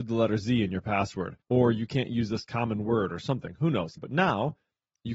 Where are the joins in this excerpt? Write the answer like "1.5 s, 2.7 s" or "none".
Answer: 1.4 s, 4.0 s